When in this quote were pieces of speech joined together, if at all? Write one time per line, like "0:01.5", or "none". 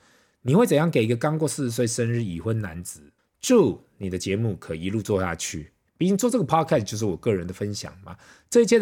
0:03.2
0:05.9